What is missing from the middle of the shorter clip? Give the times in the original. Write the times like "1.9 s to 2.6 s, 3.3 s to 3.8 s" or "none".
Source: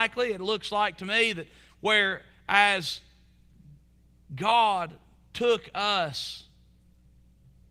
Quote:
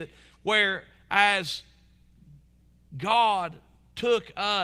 none